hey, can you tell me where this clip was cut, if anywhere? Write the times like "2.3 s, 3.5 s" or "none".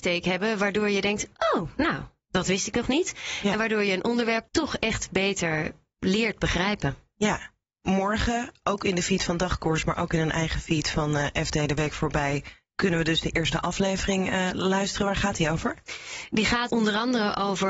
16.7 s